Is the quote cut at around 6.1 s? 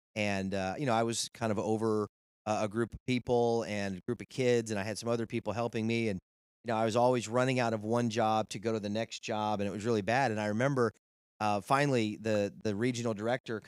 no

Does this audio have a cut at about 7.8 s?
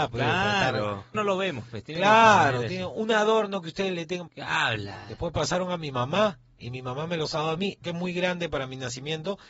yes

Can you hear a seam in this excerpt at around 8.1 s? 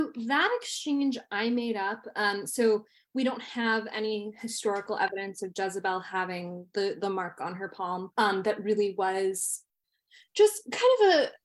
yes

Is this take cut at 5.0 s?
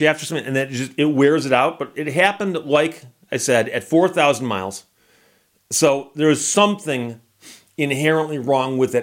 no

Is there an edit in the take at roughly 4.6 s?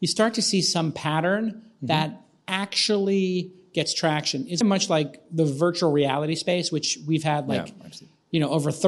yes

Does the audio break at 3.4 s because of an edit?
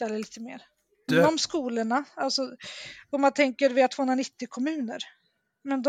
no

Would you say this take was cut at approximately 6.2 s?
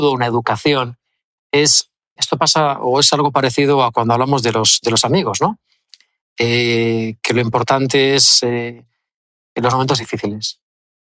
no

